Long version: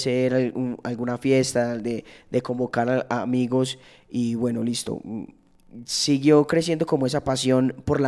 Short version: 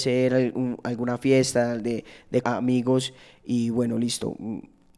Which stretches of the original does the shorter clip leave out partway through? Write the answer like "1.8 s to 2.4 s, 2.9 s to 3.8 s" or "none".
2.4 s to 3.1 s